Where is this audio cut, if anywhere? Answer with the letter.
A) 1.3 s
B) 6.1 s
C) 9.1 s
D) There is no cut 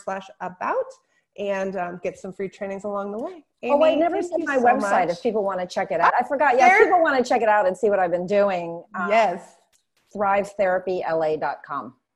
B